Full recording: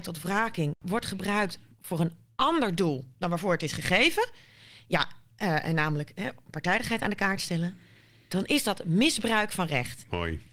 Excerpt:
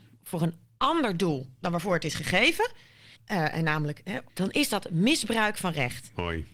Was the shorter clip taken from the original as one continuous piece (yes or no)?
no